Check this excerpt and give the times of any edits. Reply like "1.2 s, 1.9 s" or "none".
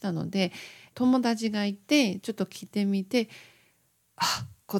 0.9 s